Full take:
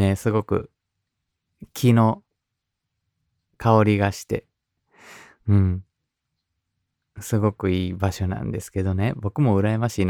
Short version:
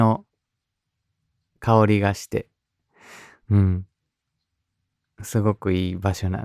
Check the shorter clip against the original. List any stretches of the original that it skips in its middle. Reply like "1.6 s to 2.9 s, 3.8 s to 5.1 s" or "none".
none